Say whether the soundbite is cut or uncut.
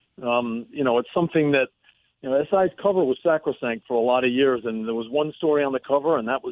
cut